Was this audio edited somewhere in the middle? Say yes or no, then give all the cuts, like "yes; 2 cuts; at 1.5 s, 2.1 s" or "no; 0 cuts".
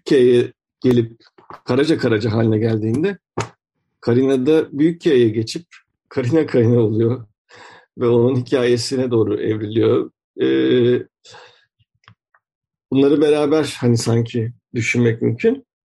no; 0 cuts